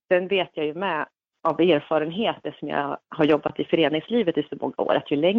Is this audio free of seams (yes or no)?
no